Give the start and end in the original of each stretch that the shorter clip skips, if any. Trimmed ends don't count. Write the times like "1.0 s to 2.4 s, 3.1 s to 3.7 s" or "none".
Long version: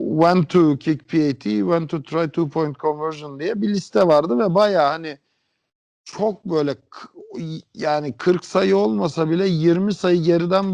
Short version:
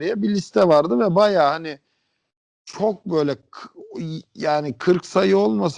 none